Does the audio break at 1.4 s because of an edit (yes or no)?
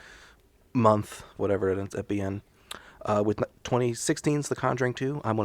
yes